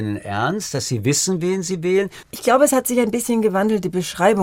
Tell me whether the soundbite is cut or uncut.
cut